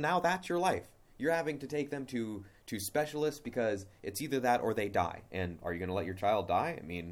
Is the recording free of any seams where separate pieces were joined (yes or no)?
no